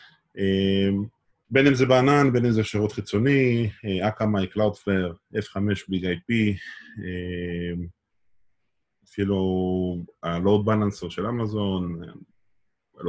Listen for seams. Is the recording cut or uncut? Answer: cut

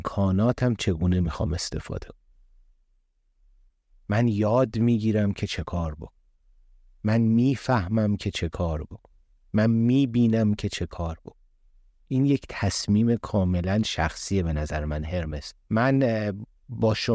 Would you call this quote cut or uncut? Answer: cut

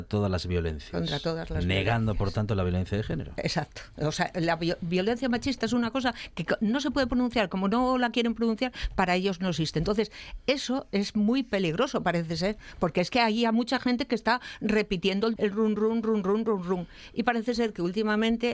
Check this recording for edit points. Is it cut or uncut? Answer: cut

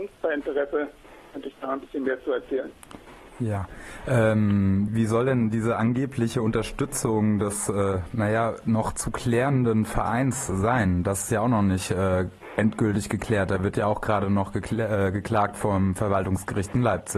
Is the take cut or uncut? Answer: cut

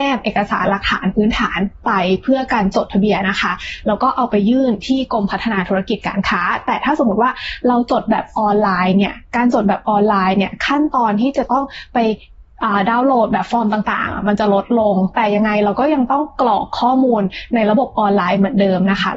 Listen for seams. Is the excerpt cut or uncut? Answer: cut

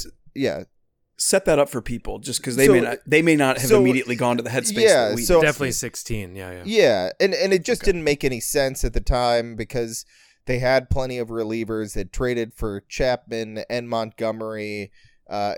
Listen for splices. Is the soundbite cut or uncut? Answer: cut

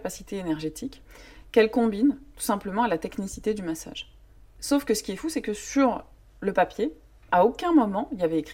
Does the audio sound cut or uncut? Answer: uncut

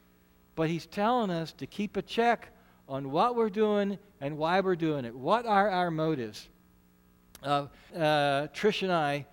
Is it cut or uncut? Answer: cut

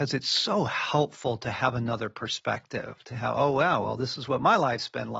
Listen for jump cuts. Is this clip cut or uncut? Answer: uncut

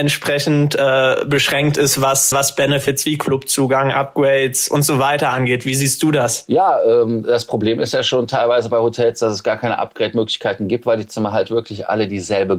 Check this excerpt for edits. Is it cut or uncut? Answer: cut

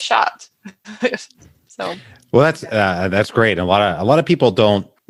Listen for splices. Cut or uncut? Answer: uncut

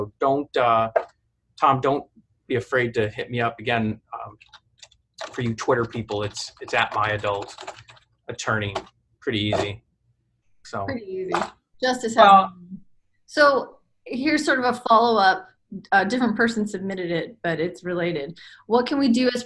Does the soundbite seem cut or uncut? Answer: uncut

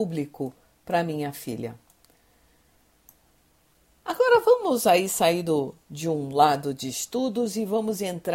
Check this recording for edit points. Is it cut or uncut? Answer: uncut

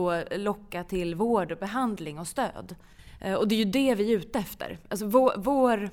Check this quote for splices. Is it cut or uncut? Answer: uncut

